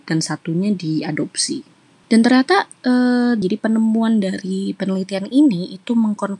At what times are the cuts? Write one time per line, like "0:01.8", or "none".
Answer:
0:02.0
0:03.4